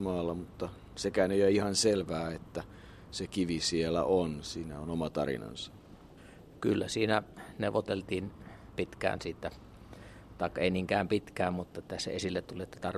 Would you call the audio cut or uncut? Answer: uncut